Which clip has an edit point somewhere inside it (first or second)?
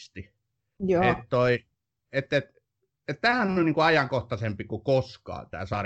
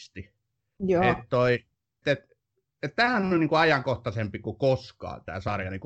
second